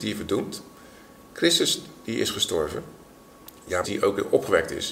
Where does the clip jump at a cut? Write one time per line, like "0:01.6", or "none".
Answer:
0:03.8

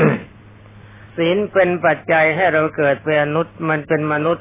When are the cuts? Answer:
0:01.1

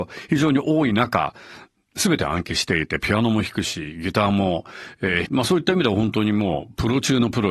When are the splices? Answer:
0:05.3

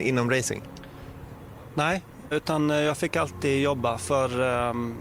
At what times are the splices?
0:02.3

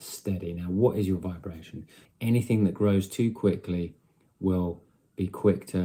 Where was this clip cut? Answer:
0:02.1

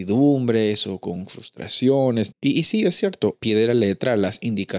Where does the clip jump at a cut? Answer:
0:02.3
0:03.3

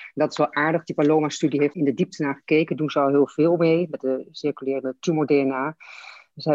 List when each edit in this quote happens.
0:01.7

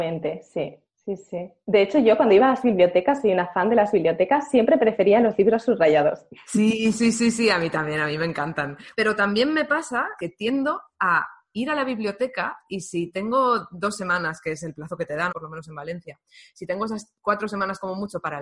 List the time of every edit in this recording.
0:08.9
0:10.2
0:15.3

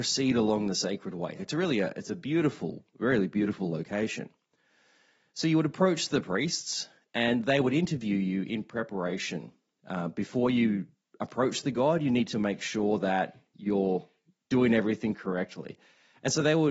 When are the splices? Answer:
0:01.4

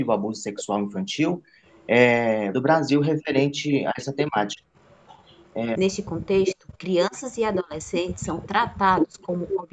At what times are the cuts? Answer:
0:02.5
0:05.7

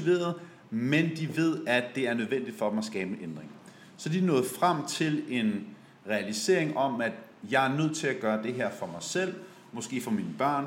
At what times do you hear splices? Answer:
none

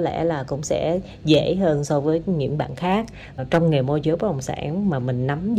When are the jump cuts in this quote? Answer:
none

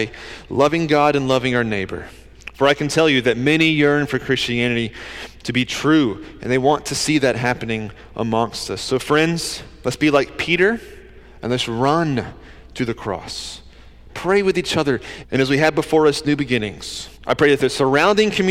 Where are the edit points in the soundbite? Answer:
0:14.1
0:15.2
0:17.2

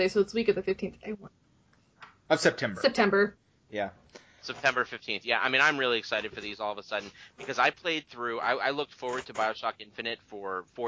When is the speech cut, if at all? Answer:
none

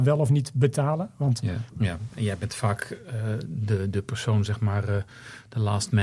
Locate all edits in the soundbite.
0:01.7

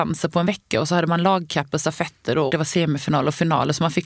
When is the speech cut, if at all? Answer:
0:02.5

